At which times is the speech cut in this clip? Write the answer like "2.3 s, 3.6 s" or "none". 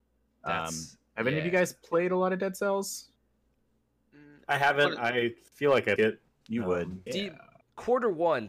6.0 s, 7.1 s